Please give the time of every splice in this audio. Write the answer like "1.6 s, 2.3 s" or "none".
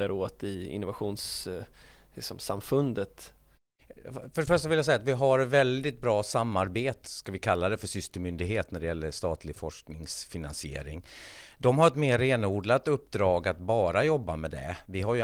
7.0 s